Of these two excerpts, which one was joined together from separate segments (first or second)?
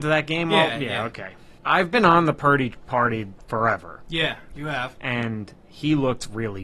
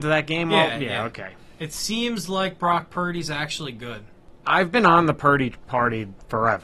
first